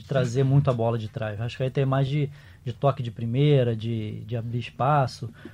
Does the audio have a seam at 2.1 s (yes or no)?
no